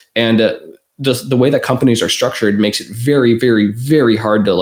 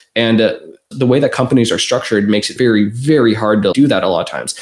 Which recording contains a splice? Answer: second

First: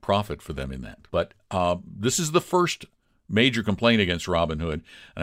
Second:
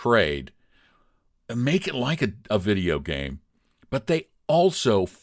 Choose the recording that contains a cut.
first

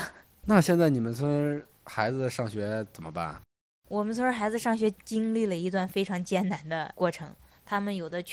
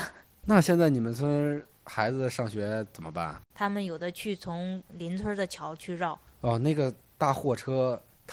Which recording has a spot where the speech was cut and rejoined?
second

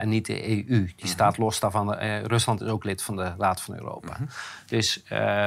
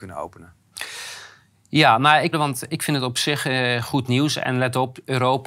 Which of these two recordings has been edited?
second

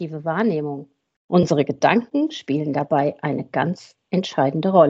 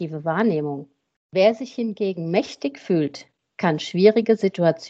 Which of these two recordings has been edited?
first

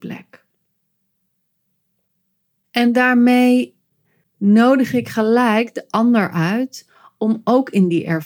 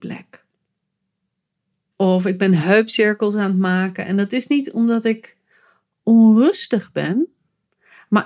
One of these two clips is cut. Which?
second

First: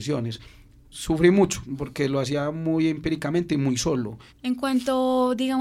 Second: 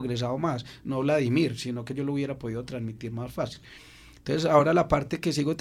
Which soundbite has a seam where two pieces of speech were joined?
first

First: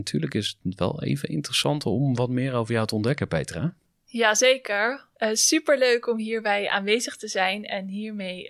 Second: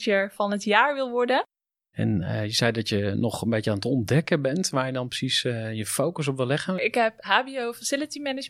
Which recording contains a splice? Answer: second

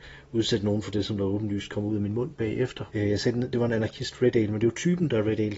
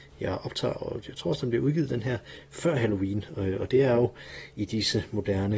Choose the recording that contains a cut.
first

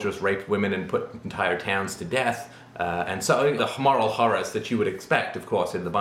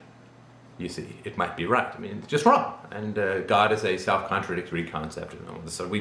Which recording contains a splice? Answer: first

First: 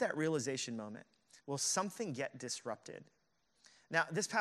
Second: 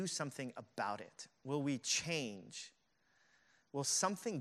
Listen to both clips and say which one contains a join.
first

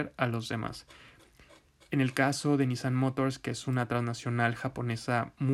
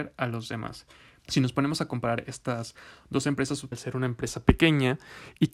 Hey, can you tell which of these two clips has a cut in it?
second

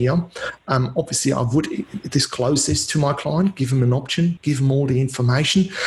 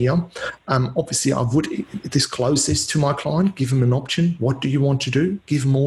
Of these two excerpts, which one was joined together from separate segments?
first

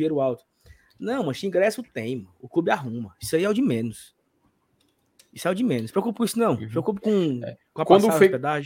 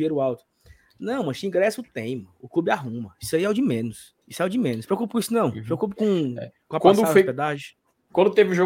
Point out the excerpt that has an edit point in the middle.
second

